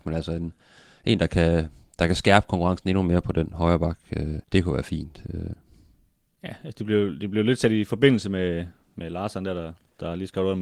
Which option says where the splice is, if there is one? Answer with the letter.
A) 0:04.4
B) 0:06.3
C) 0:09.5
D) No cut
A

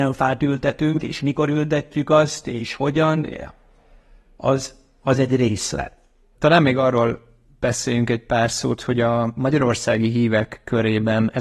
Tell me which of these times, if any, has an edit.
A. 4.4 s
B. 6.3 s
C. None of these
B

